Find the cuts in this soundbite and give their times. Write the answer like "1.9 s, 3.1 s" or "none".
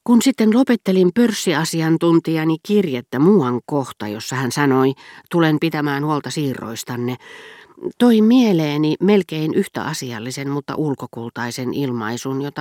none